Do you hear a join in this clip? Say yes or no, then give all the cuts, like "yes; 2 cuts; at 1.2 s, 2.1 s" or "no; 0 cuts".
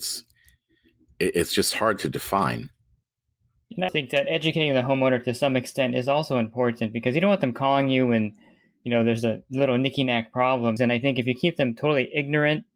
yes; 2 cuts; at 3.9 s, 10.8 s